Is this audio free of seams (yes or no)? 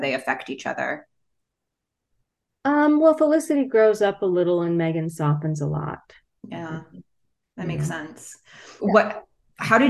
no